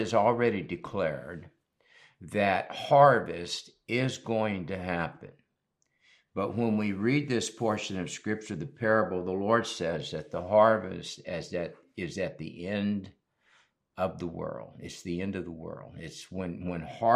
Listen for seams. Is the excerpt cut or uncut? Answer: uncut